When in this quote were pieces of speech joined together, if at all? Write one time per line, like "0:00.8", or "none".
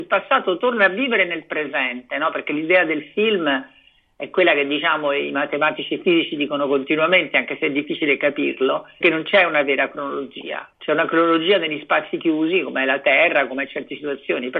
0:09.0
0:10.7